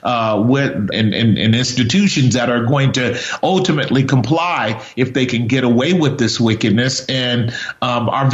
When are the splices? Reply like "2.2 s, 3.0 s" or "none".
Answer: 0.9 s